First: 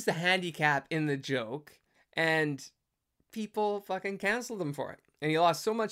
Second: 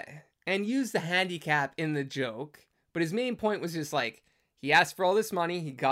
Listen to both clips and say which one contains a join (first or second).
first